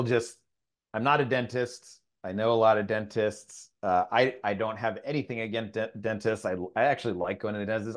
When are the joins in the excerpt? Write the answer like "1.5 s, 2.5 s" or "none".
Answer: none